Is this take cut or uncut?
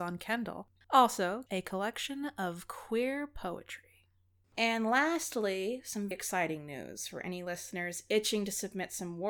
cut